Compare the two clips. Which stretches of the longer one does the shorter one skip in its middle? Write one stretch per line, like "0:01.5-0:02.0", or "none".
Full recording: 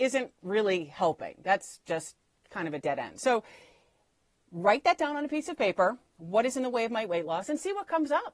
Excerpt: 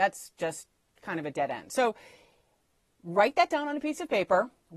none